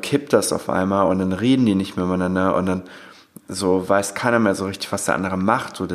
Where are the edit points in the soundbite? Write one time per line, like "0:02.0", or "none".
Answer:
none